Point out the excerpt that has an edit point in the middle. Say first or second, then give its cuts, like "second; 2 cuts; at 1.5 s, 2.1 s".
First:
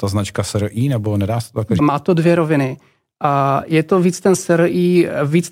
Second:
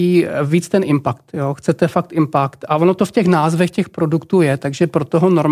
first; 1 cut; at 1.8 s